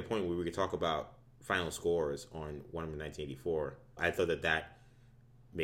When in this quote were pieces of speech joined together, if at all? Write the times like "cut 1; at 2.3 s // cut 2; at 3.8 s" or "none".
cut 1; at 4.0 s